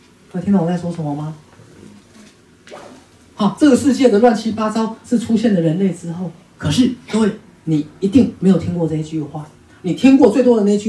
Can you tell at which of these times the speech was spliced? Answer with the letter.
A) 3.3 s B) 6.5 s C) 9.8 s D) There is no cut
B